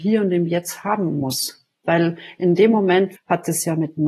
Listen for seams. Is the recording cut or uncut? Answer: cut